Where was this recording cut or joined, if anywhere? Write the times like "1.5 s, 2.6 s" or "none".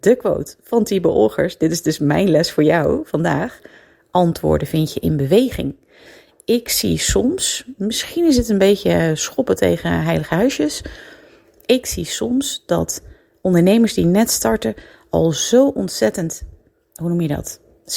none